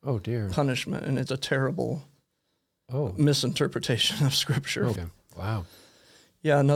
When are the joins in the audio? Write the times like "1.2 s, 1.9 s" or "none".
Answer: 1.3 s, 5.0 s